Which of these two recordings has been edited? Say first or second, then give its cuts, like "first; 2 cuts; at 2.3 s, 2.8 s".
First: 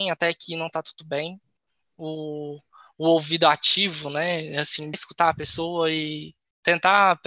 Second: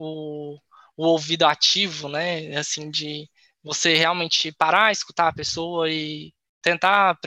first; 1 cut; at 4.9 s